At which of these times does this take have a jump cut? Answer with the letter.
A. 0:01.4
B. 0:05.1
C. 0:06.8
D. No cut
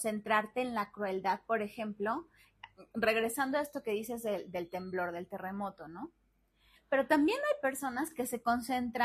C